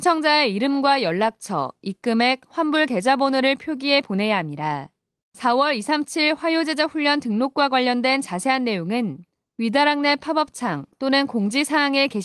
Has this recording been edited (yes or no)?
yes